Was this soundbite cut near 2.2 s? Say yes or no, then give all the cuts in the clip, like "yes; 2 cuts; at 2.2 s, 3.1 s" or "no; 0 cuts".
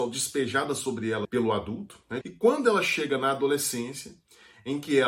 yes; 1 cut; at 2.2 s